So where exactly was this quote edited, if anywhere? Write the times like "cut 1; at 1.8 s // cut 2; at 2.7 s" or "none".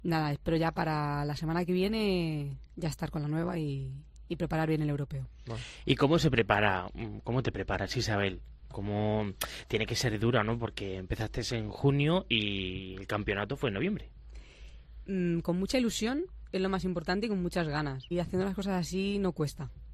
cut 1; at 18.1 s